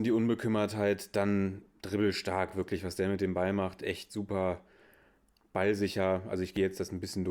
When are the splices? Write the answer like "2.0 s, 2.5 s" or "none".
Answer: none